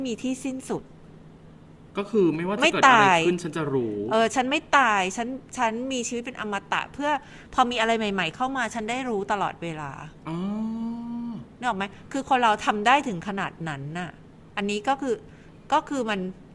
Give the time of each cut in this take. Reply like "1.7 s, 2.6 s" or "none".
none